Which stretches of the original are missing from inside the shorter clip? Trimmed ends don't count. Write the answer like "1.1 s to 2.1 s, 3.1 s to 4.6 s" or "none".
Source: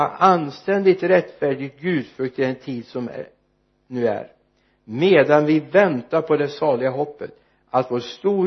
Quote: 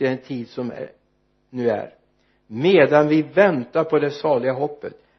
none